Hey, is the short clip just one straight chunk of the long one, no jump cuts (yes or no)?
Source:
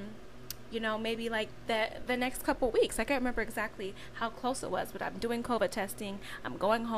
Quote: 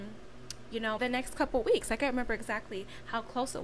no